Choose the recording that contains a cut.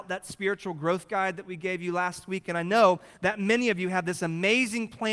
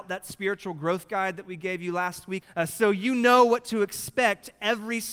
second; 1 cut; at 2.4 s

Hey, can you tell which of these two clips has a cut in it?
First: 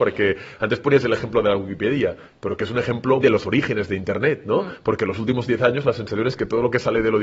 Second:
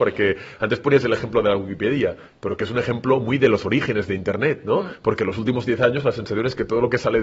first; 1 cut; at 3.2 s

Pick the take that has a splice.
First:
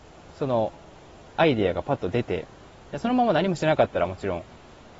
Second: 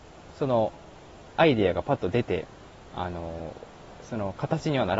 second; 1 cut; at 2.9 s

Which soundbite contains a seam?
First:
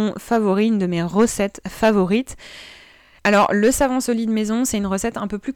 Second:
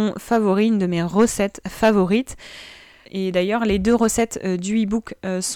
second; 1 cut; at 3.0 s

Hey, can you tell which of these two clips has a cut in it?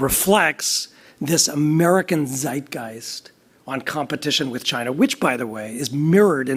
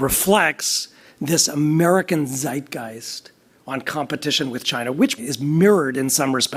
second; 1 cut; at 5.2 s

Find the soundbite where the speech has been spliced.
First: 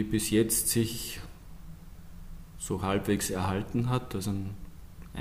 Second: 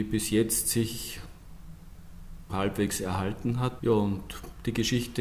second; 2 cuts; at 2.5 s, 3.8 s

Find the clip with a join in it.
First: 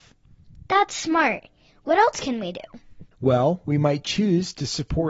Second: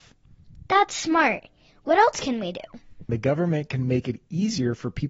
second; 1 cut; at 3.1 s

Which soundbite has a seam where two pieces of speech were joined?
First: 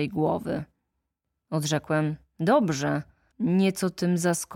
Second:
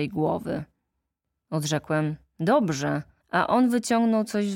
second; 1 cut; at 3.2 s

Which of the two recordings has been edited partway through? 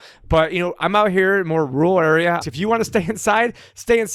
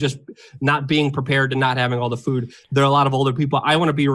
first; 1 cut; at 2.4 s

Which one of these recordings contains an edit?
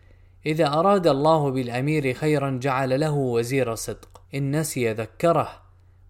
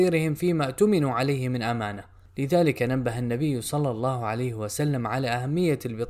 first; 1 cut; at 4.3 s

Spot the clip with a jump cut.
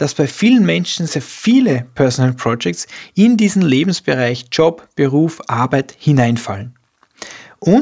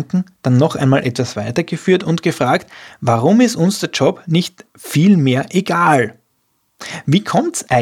first; 1 cut; at 1.1 s

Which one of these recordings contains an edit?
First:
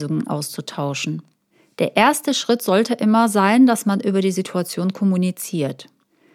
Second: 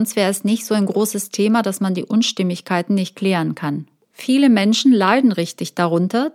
second; 1 cut; at 4.1 s

